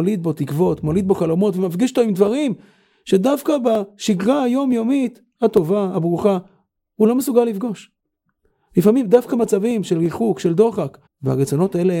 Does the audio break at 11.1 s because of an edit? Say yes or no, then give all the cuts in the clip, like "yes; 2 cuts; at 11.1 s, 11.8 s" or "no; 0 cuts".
yes; 1 cut; at 11.1 s